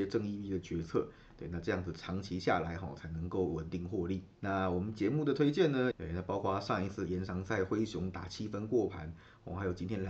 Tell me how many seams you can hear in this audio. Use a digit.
2